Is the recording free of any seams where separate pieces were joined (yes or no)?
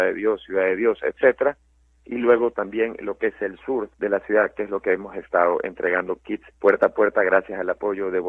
no